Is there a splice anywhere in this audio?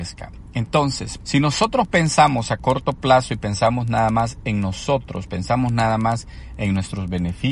yes; 1 cut; at 1.2 s

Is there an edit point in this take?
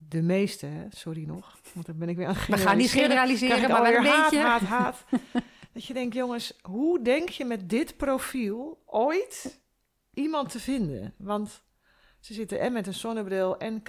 no; 0 cuts

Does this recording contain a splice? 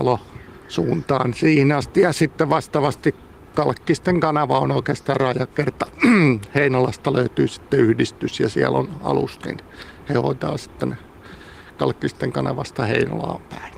no; 0 cuts

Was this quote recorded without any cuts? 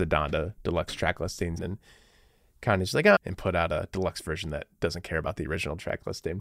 no; 2 cuts; at 1.6 s, 3.2 s

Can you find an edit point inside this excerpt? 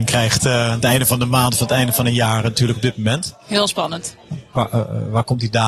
yes; 1 cut; at 4.5 s

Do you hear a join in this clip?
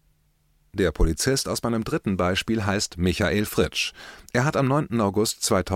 no; 0 cuts

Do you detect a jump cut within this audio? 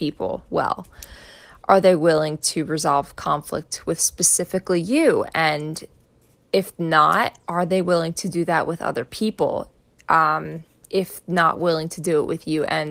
no; 0 cuts

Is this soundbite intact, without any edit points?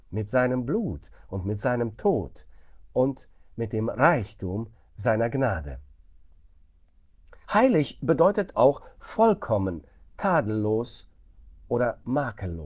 no; 2 cuts; at 7.4 s, 8.5 s

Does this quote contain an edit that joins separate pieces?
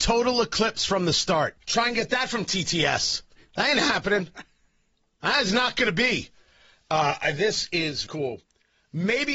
yes; 2 cuts; at 1.6 s, 8.1 s

